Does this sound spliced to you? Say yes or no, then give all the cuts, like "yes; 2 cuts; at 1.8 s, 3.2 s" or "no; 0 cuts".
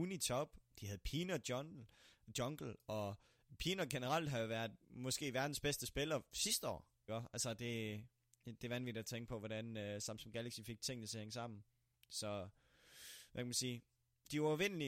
yes; 1 cut; at 7.1 s